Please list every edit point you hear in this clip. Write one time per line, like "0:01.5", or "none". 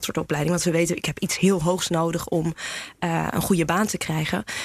none